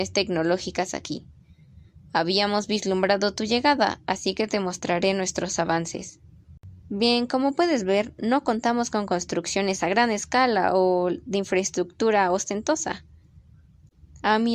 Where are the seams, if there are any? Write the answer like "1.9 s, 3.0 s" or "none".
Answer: 6.8 s